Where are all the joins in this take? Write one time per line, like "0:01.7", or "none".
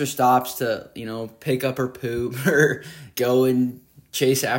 0:03.1

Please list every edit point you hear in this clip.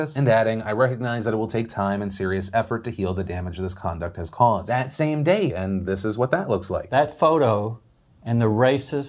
0:05.5

